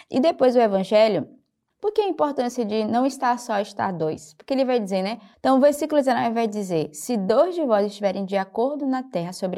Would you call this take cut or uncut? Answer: cut